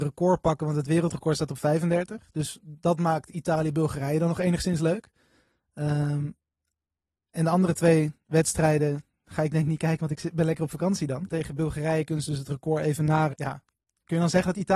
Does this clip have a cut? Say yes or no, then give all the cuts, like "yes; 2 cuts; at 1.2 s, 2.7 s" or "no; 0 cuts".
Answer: yes; 2 cuts; at 11.3 s, 13.3 s